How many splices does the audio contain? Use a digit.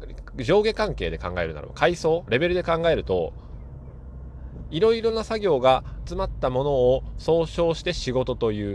2